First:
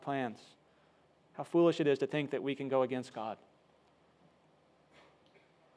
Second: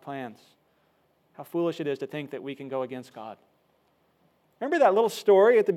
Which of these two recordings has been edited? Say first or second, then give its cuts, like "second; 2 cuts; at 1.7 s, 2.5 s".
second; 1 cut; at 4.5 s